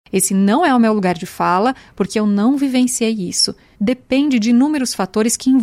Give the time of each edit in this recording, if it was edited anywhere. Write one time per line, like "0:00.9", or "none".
0:03.7